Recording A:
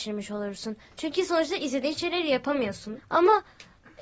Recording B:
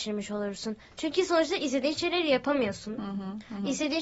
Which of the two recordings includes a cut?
A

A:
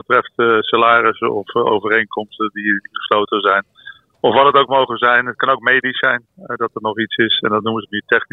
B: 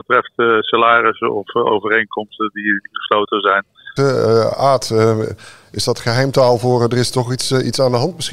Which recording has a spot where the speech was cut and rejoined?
B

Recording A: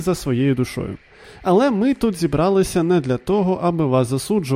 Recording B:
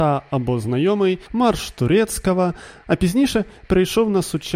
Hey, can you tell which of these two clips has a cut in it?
B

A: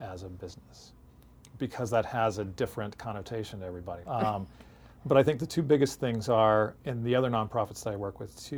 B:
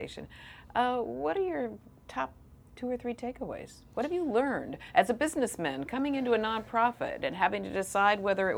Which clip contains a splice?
A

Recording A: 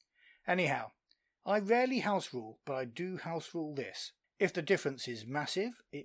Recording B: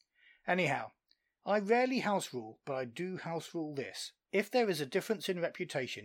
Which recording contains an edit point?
A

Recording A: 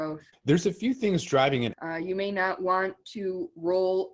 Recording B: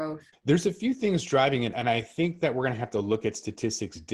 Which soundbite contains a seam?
A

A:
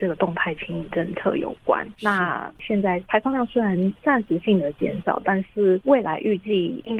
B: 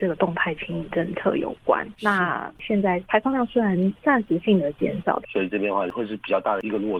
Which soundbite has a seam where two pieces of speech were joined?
B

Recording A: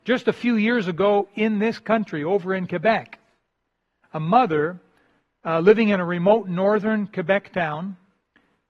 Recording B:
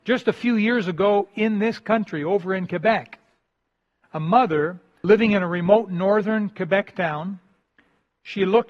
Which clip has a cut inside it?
B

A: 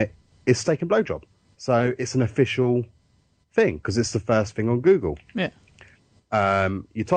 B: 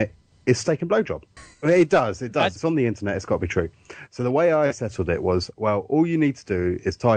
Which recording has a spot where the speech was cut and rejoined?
B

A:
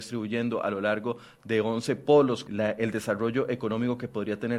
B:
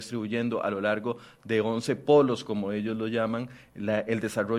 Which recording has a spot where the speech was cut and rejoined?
A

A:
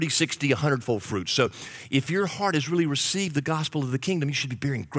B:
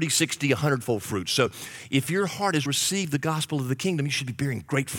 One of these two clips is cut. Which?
B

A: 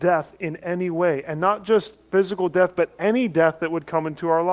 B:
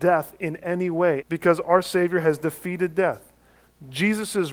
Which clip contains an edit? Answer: B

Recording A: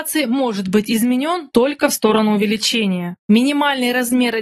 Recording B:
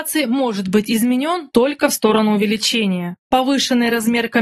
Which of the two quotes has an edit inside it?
A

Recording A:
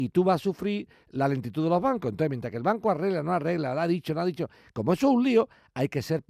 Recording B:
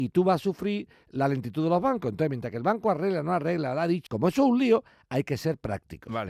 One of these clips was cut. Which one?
B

